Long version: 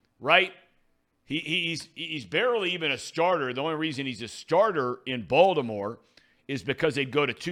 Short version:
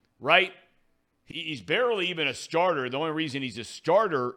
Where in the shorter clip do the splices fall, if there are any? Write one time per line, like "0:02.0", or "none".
0:01.3